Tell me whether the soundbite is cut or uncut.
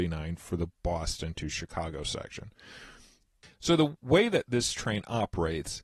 uncut